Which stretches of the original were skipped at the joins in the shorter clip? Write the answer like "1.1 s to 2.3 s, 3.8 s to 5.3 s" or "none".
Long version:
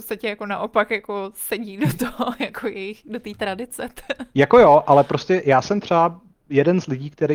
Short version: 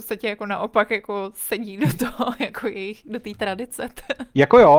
none

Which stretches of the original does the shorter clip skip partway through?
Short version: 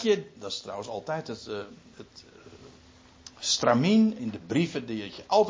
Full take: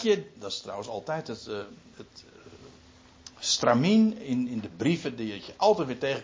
4.2 s to 4.5 s

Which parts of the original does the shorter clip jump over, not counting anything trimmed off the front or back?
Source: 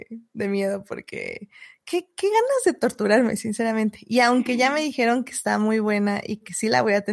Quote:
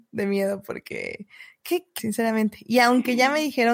2.2 s to 3.4 s

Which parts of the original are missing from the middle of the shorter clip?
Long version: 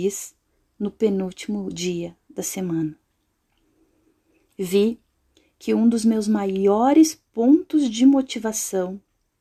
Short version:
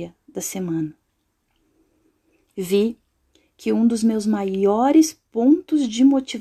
none

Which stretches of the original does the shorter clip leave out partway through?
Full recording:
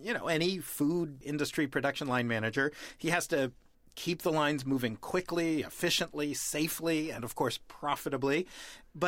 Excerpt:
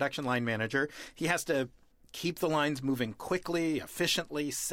none

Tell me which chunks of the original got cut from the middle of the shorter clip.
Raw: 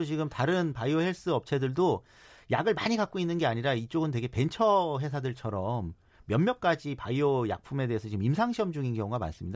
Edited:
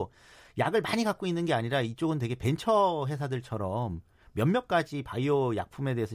none

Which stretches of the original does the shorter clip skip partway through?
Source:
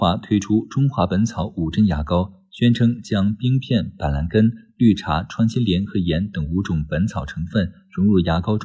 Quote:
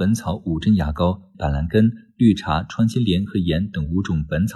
2.5 s to 3.9 s

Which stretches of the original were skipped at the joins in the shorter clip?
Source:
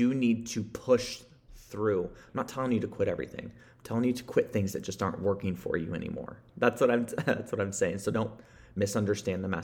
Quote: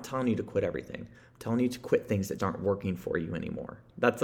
4.8 s to 5.0 s

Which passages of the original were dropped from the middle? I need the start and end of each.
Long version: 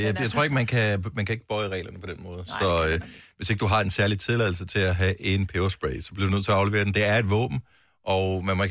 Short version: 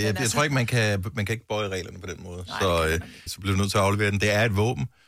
3.3 s to 6.0 s

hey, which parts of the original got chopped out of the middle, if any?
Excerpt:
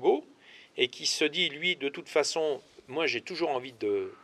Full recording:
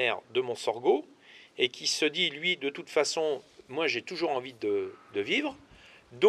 none

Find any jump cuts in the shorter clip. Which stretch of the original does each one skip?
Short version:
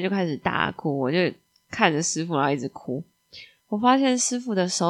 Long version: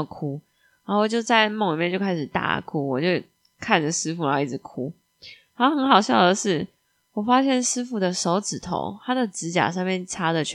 5.5 s to 7.1 s

